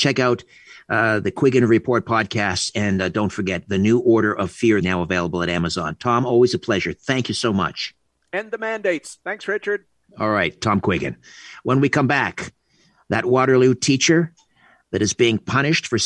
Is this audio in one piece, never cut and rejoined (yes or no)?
no